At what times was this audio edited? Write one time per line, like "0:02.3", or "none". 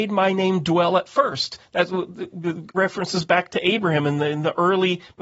0:02.7